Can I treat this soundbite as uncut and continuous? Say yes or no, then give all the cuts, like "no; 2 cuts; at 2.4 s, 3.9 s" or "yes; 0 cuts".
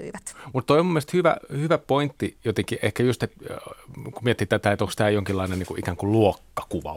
yes; 0 cuts